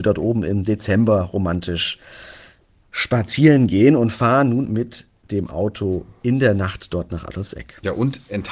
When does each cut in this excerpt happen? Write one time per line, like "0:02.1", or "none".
0:04.7